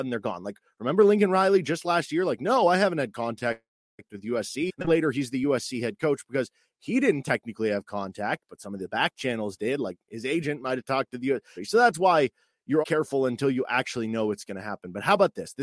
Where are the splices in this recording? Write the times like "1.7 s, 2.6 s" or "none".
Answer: 11.6 s, 12.8 s

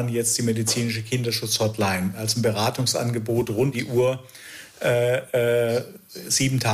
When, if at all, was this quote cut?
3.7 s

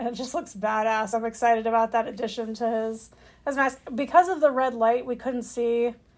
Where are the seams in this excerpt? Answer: none

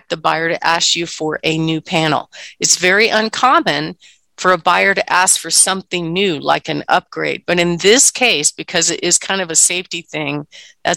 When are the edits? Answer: none

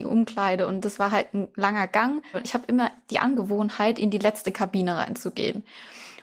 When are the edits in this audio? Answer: 2.3 s

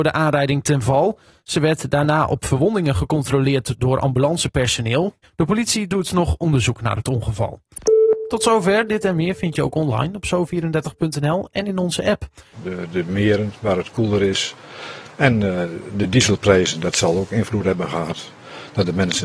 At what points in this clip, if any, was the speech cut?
5.2 s, 12.5 s

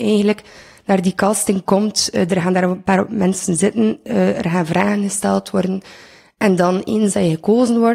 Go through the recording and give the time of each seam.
none

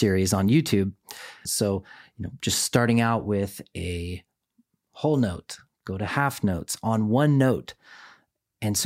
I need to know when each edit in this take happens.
1.5 s

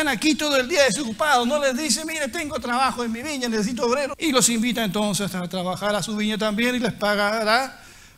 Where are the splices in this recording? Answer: 4.1 s

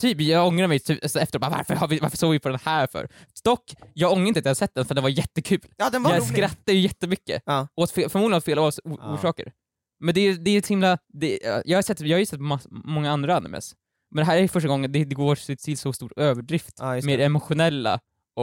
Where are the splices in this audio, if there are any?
11.0 s, 15.6 s

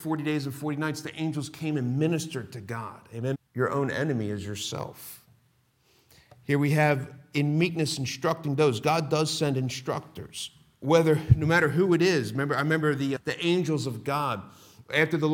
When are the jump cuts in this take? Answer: 3.3 s, 13.2 s

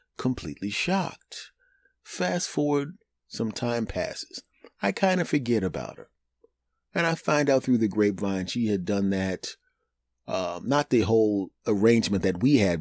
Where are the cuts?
none

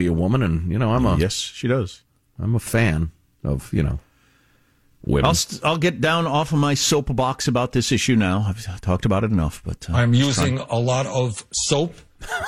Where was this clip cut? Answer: none

